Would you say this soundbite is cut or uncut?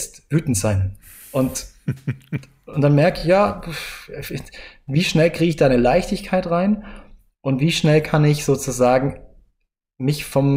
uncut